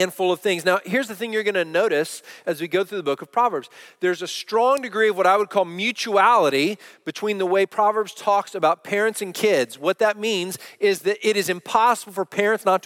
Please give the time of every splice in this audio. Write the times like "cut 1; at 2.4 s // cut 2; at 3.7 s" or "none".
none